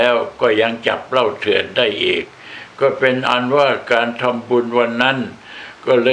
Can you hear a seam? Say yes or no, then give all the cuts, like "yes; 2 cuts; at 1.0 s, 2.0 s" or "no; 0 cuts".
no; 0 cuts